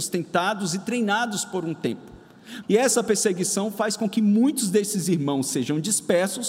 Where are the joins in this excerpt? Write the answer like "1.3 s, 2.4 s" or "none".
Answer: 2.6 s